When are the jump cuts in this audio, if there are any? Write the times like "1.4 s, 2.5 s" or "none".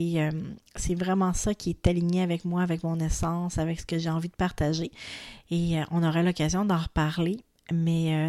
5.4 s